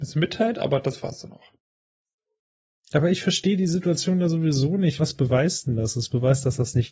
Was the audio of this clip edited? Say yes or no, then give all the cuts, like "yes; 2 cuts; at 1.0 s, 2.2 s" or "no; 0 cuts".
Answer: yes; 2 cuts; at 2.7 s, 5.0 s